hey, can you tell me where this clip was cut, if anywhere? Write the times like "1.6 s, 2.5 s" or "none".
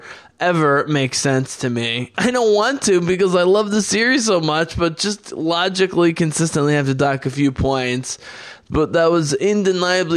2.1 s